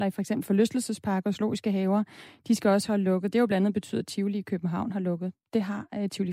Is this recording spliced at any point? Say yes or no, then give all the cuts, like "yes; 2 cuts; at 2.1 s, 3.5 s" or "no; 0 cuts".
no; 0 cuts